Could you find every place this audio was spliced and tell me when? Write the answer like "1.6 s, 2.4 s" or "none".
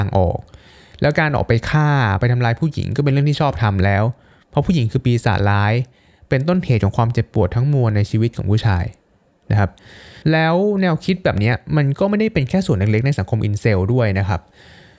10.2 s